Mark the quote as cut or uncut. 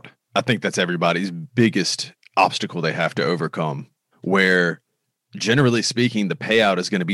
cut